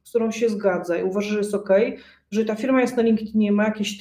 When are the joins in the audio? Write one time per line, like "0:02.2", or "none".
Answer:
none